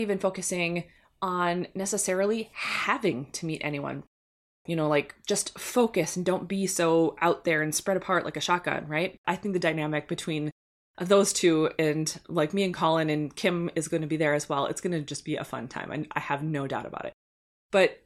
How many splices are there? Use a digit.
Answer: 2